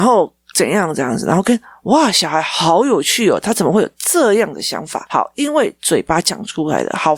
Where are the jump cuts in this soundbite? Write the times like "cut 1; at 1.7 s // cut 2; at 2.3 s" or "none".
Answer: cut 1; at 5.1 s